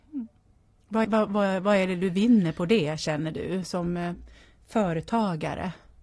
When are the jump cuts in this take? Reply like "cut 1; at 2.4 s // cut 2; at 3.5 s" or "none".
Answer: cut 1; at 1.0 s